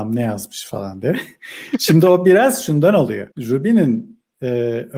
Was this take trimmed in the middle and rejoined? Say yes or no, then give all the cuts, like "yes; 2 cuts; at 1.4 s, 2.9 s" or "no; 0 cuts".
yes; 1 cut; at 3.3 s